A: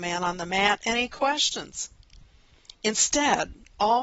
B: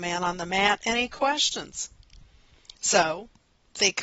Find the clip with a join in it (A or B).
B